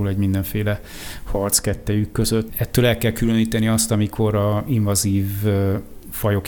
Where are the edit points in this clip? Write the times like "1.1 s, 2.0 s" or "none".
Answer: 2.5 s